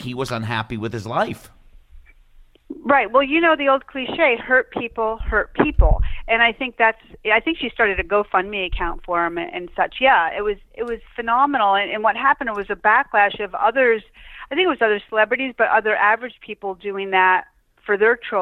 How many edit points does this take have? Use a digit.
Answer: 0